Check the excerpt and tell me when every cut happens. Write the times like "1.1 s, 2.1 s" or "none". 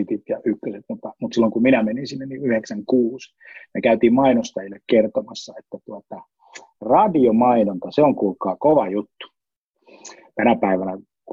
none